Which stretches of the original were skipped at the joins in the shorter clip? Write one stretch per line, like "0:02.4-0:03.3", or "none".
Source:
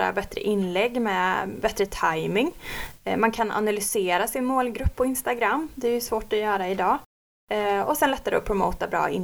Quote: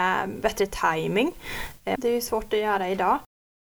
0:03.2-0:05.8